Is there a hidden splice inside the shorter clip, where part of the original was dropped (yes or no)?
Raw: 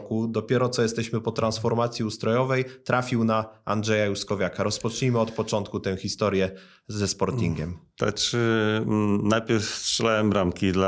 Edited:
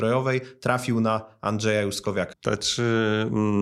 yes